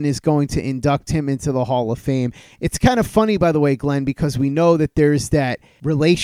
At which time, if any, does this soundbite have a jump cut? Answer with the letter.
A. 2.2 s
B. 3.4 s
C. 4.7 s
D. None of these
D